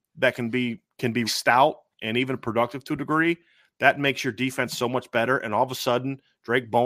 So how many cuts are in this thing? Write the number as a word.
one